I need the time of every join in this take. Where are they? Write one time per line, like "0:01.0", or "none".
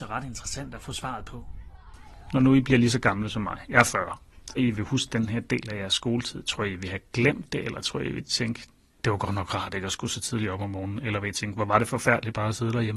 0:04.6